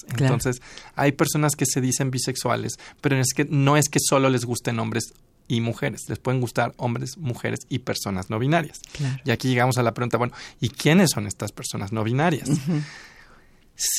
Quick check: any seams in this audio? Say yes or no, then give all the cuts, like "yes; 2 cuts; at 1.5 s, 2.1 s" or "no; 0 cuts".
no; 0 cuts